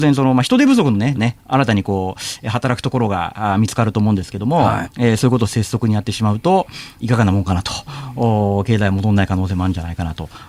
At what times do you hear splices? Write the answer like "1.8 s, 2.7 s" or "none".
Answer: 1.1 s, 4.8 s, 7.0 s